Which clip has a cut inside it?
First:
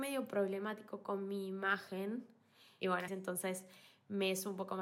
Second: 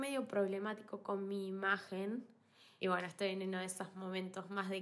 first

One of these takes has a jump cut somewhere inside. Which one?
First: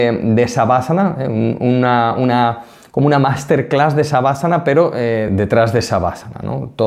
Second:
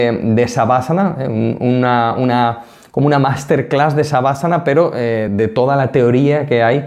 first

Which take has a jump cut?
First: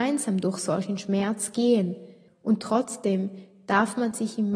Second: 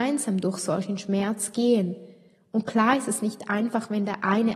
first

